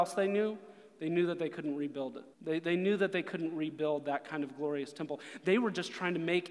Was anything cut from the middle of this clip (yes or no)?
yes